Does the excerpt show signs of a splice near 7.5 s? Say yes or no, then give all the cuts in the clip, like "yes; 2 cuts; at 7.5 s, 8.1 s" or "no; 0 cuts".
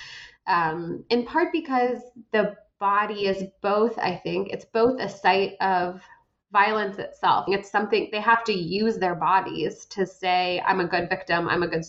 yes; 1 cut; at 7.5 s